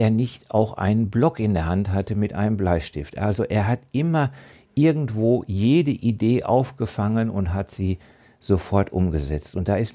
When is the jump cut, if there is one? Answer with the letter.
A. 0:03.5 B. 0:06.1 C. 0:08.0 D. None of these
D